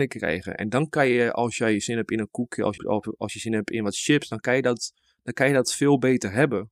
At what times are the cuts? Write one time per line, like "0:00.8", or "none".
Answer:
0:02.8

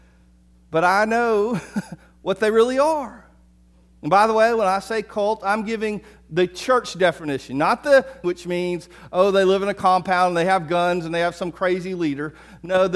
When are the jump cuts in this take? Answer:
0:08.2

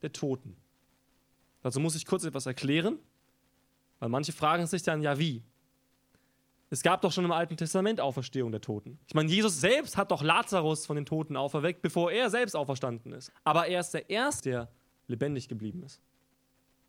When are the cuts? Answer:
0:13.3
0:14.4

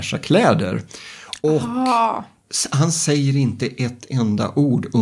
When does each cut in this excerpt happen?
none

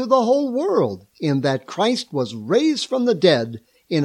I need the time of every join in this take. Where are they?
0:01.1

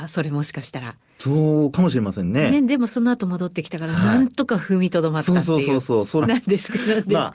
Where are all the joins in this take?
0:06.2

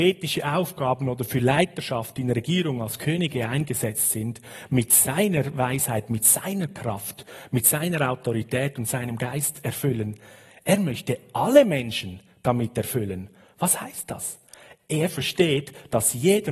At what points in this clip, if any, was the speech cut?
none

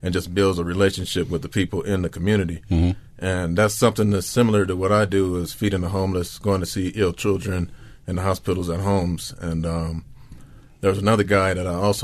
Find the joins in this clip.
none

